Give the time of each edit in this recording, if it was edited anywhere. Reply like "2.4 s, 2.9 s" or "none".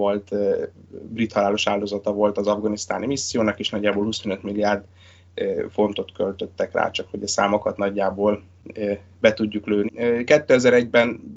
9.9 s